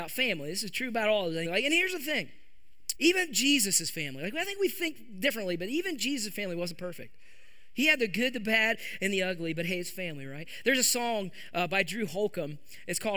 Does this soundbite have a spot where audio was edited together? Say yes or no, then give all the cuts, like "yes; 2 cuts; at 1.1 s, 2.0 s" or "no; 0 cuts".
yes; 2 cuts; at 1.4 s, 2.9 s